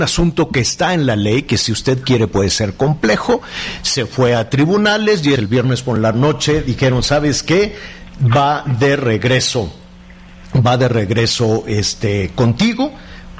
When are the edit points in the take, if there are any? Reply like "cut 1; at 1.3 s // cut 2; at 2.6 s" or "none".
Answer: cut 1; at 5.4 s